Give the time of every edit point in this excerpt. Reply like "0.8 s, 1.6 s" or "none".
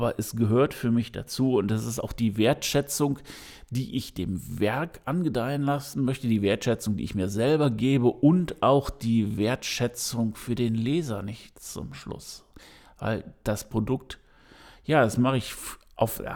none